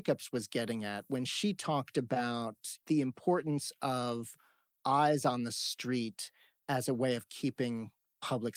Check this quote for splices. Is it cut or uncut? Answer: cut